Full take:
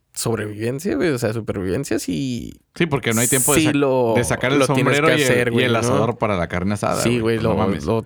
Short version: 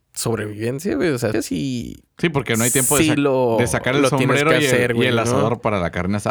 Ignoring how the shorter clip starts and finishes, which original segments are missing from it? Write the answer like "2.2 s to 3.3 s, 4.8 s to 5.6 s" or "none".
1.3 s to 1.9 s